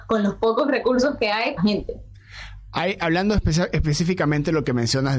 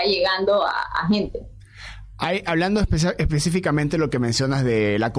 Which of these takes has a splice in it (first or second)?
first